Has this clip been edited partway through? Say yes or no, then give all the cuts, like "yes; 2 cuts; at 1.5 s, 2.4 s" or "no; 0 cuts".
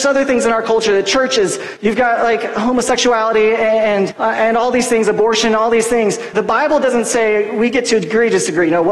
yes; 3 cuts; at 1.8 s, 4.1 s, 6.3 s